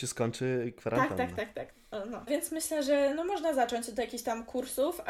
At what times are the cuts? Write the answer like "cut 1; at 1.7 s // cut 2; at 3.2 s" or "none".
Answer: cut 1; at 2.3 s